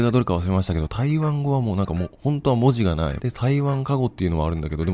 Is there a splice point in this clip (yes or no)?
yes